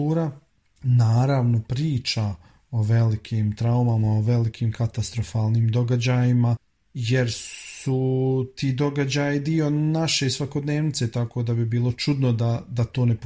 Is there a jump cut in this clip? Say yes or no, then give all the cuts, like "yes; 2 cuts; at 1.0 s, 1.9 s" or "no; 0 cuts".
no; 0 cuts